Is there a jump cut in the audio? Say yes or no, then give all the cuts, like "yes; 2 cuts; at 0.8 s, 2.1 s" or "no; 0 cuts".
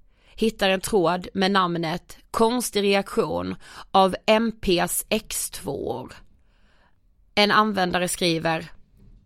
no; 0 cuts